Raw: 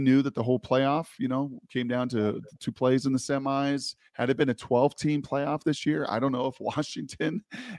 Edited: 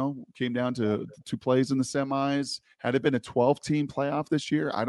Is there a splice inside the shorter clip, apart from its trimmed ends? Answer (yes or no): no